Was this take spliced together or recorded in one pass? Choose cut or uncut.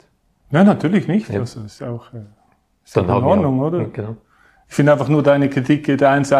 uncut